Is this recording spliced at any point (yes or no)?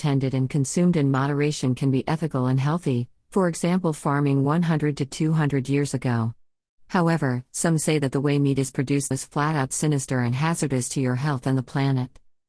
yes